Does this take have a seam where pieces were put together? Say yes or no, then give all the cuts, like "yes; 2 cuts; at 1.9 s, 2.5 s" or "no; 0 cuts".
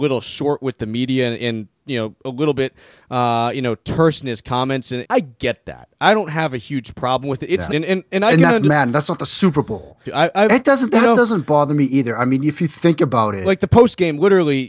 yes; 3 cuts; at 5.0 s, 7.7 s, 10.1 s